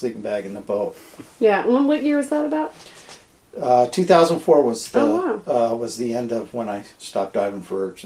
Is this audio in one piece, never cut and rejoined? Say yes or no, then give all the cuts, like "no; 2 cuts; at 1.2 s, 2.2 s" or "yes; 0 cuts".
yes; 0 cuts